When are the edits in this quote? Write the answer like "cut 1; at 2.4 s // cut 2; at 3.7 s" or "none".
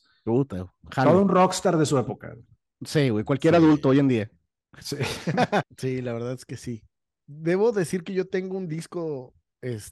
cut 1; at 5.6 s